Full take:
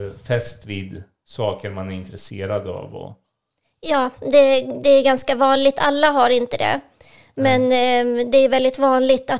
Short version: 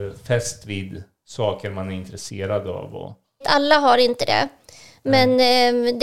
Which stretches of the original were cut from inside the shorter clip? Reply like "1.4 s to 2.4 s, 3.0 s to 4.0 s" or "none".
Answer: 3.4 s to 5.7 s